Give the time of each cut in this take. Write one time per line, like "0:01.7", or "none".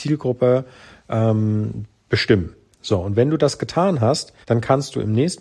0:04.4

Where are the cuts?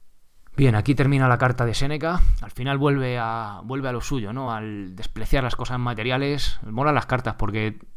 none

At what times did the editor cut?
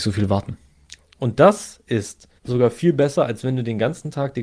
0:01.0
0:02.4

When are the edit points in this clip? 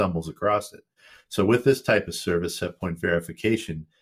none

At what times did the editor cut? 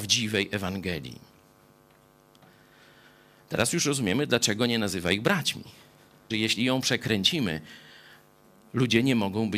0:06.3

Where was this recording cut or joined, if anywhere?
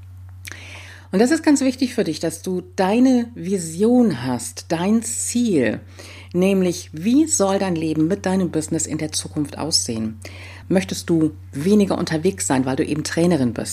0:10.6

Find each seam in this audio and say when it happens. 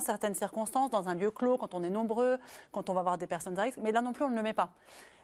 none

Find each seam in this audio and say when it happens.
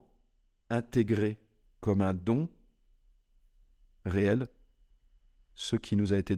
none

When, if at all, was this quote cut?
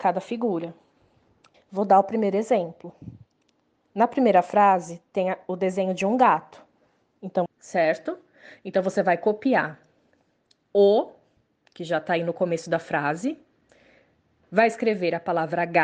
0:01.5
0:07.5

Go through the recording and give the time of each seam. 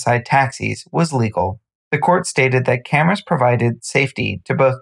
none

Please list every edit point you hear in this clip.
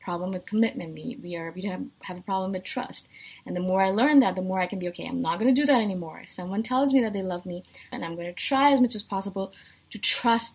0:07.9

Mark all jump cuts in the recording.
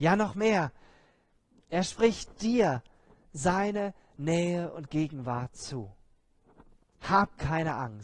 0:01.6

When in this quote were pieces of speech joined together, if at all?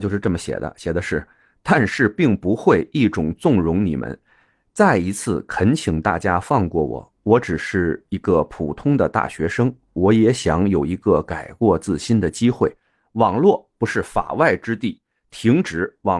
none

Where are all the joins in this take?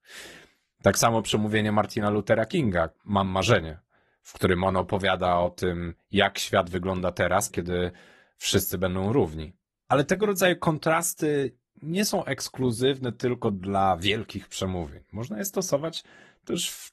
0:07.5

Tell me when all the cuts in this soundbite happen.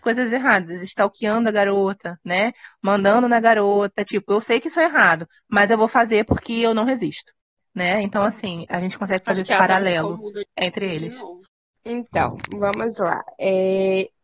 none

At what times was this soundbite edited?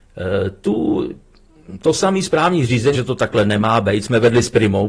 0:02.9

